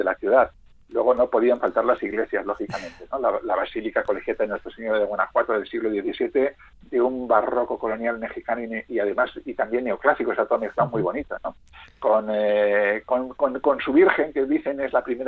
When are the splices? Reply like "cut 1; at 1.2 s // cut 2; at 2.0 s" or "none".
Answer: none